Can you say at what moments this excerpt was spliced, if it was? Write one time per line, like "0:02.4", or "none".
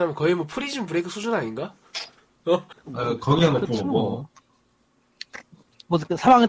0:02.7